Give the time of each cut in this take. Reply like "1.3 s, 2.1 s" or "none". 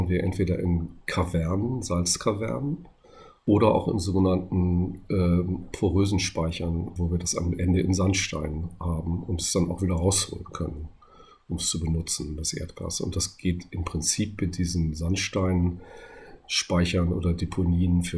7.0 s